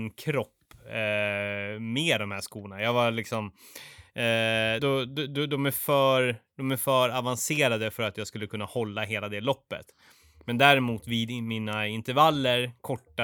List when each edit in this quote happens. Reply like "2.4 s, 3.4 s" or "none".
4.8 s